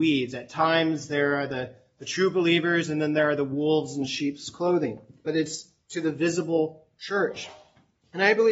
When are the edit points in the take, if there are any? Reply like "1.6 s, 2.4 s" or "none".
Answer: none

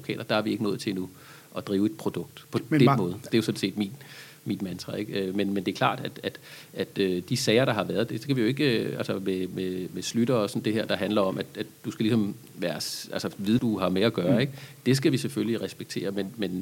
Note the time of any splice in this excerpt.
3.3 s, 13.6 s

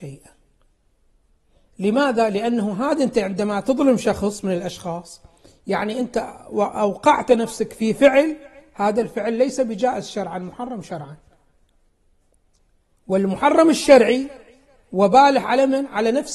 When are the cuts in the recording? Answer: none

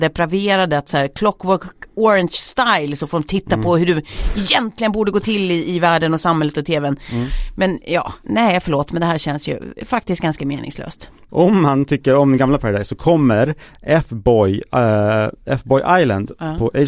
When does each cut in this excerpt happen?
8.2 s

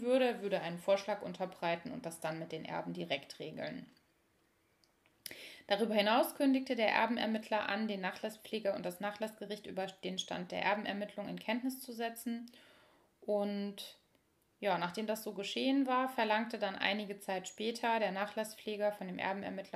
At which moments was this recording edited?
none

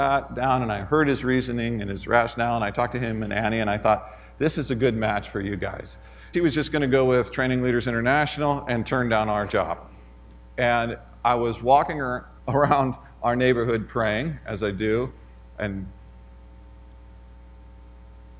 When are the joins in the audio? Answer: 6.3 s, 12.4 s

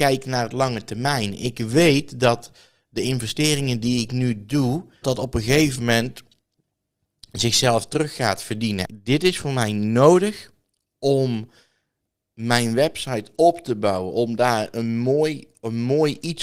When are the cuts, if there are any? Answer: 5.0 s, 8.8 s

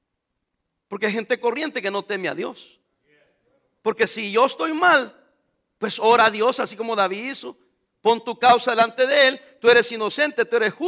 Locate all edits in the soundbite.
none

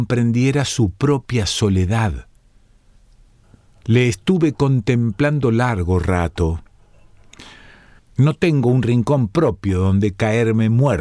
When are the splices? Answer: 8.0 s

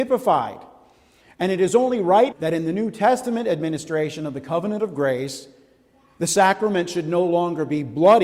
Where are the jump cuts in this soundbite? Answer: 2.3 s

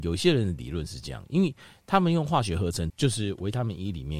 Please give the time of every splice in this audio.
2.9 s

